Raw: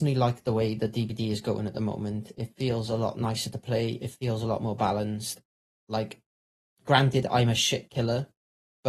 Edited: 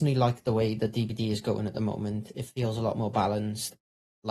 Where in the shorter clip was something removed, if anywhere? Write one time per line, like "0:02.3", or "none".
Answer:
0:02.3